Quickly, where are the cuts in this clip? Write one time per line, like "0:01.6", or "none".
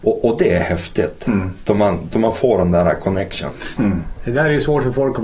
0:03.8